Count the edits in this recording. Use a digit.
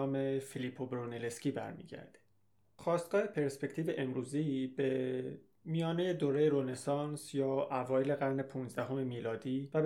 1